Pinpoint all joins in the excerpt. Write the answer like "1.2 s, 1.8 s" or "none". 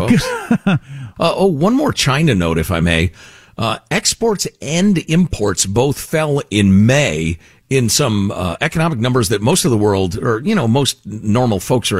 none